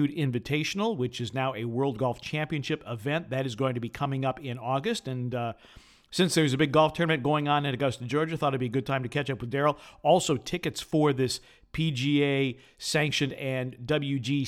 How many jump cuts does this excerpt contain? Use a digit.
0